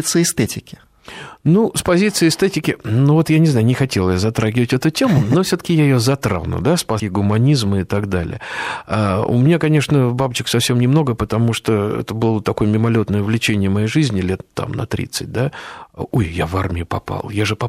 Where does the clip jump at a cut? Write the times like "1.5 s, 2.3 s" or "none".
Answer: 7.0 s

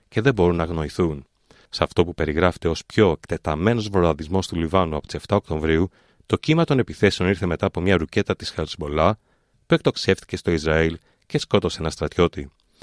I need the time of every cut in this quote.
1.7 s

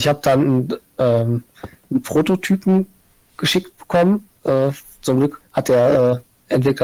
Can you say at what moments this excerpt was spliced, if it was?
4.4 s, 5.4 s

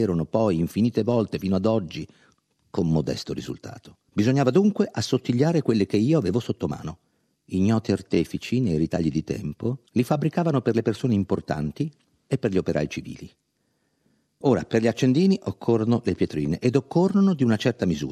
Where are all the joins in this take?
4.1 s, 7.3 s, 9.9 s

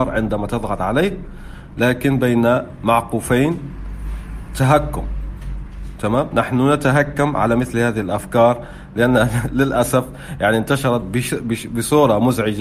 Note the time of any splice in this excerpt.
none

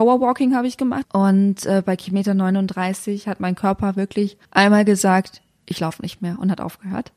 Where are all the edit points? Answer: 1.0 s, 4.4 s

